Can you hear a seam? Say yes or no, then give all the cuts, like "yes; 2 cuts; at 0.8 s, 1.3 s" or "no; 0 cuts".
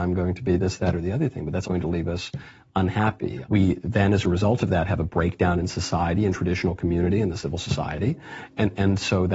yes; 1 cut; at 1.6 s